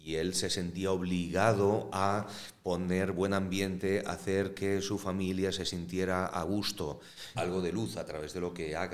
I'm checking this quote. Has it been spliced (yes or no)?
yes